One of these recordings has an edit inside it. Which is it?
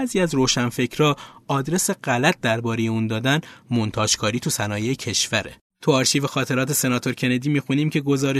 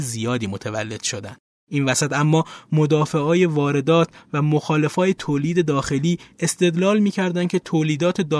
first; 1 cut; at 5.7 s

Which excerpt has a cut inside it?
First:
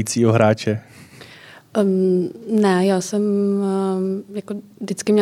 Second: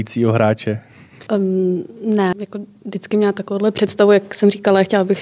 second; 2 cuts; at 1.3 s, 2.3 s

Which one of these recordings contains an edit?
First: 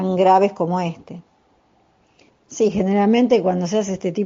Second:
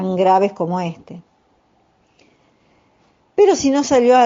first; 1 cut; at 2.3 s

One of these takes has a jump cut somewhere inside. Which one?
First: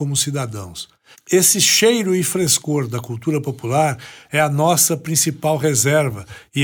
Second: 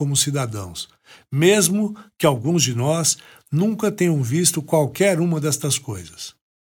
first; 1 cut; at 1.1 s

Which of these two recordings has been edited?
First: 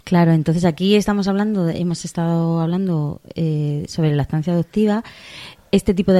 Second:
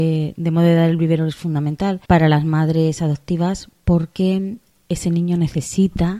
second; 1 cut; at 2.0 s

